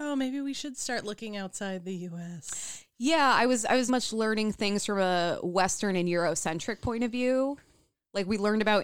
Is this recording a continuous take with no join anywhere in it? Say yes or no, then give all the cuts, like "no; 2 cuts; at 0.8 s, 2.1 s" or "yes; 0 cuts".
no; 1 cut; at 3.9 s